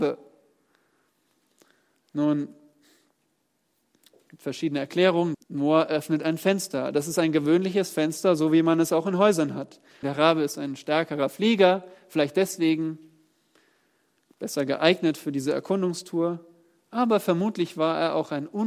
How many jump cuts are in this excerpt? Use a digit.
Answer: 2